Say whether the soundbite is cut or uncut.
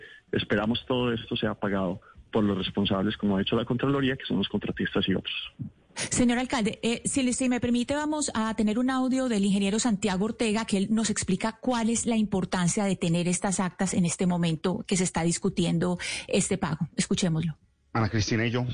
uncut